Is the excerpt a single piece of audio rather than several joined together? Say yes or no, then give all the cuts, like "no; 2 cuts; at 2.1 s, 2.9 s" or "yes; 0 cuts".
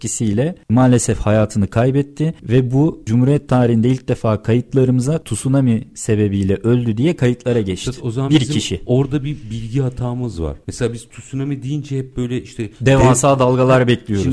yes; 0 cuts